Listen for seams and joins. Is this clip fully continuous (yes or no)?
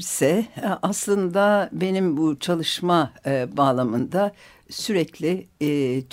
yes